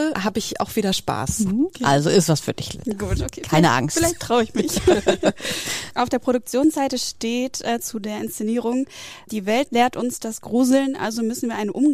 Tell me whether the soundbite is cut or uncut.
uncut